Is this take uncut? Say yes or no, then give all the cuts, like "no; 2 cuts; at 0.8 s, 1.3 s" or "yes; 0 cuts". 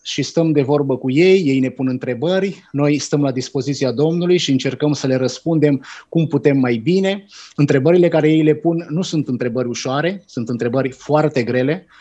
yes; 0 cuts